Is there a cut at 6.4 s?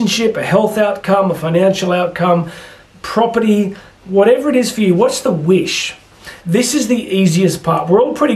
yes; 1 cut; at 6.4 s

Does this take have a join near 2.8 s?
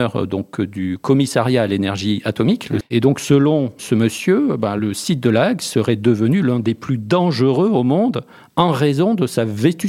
yes; 1 cut; at 2.8 s

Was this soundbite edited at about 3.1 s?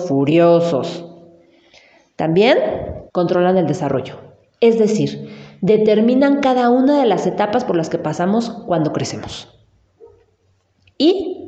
yes; 1 cut; at 3.1 s

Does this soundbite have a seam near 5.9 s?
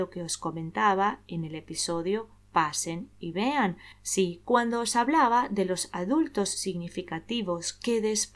no; 1 cut; at 4.4 s

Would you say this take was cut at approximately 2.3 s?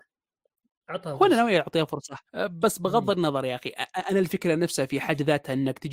yes; 1 cut; at 2.3 s

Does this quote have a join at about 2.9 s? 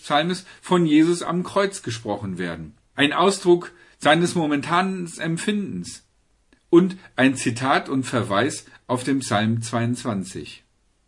yes; 1 cut; at 2.9 s

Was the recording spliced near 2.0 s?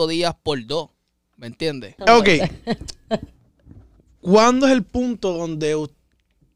yes; 1 cut; at 2.0 s

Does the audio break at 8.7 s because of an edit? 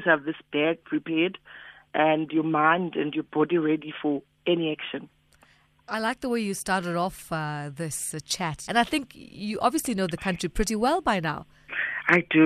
yes; 1 cut; at 8.7 s

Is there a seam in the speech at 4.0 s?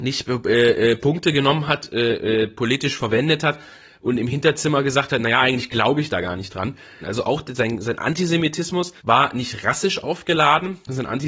no; 2 cuts; at 7.0 s, 9.0 s

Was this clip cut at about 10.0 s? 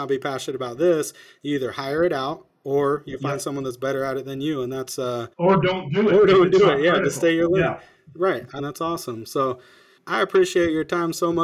yes; 3 cuts; at 5.3 s, 8.6 s, 10.0 s

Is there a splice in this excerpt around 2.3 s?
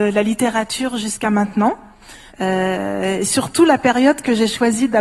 yes; 1 cut; at 2.3 s

